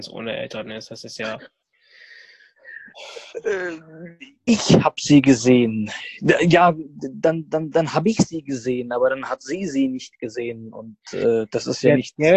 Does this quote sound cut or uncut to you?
uncut